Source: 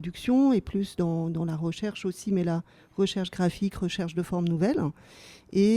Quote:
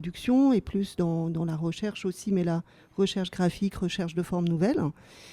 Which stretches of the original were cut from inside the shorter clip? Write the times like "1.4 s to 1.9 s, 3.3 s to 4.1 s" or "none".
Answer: none